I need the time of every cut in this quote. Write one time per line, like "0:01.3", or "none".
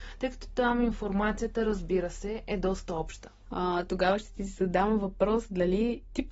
0:03.4